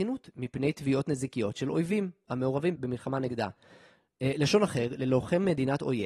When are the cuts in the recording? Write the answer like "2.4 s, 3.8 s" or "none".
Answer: 2.8 s